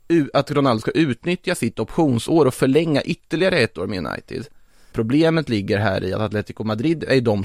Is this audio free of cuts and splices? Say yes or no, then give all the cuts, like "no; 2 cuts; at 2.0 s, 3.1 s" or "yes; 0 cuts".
no; 1 cut; at 4.9 s